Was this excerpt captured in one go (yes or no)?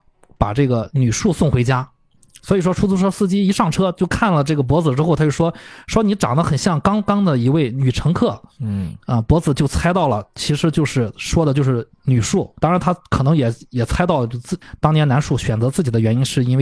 no